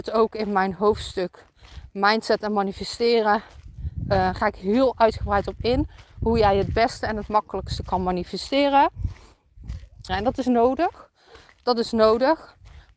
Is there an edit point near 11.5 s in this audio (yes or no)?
no